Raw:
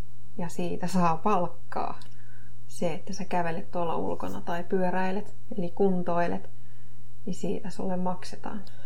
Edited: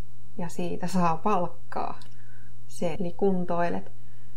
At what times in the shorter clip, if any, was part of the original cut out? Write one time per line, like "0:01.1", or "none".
0:03.0